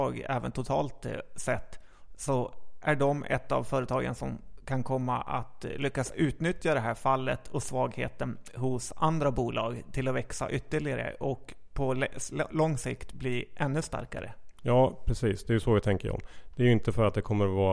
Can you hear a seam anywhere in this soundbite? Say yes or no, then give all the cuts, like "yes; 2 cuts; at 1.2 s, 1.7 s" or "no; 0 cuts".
no; 0 cuts